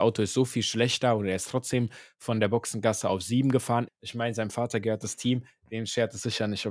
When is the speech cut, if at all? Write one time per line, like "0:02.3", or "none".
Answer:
0:03.9